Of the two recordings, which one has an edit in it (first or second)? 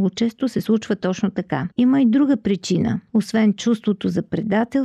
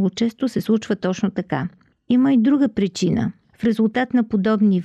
first